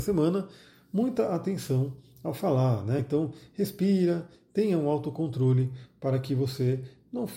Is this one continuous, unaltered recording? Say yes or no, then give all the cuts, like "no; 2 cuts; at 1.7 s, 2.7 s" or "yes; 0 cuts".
yes; 0 cuts